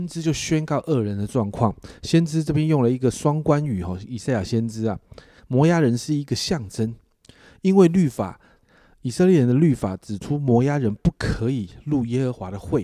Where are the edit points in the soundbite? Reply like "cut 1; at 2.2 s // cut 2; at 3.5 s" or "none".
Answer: cut 1; at 5.4 s